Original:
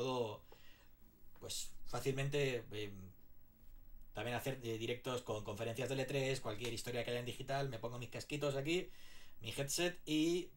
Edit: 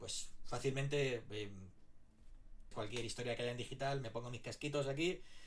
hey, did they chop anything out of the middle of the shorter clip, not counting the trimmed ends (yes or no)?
yes